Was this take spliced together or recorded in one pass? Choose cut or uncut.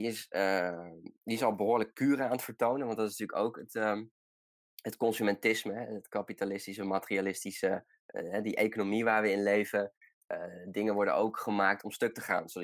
uncut